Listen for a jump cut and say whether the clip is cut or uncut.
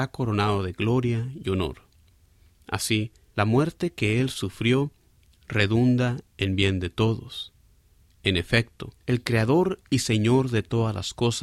cut